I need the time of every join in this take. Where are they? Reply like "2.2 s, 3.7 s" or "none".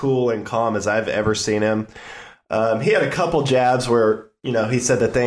none